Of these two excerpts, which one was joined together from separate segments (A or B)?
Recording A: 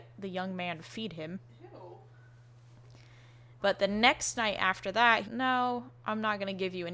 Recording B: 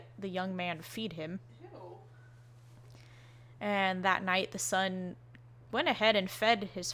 A